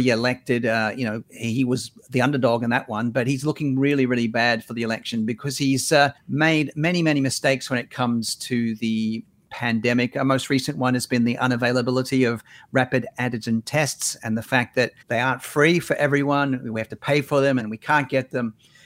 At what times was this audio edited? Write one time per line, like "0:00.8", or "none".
0:15.0
0:17.6